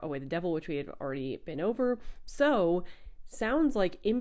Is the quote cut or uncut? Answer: cut